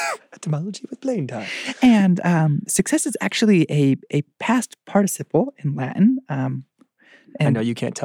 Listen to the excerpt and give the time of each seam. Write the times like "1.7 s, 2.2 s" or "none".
none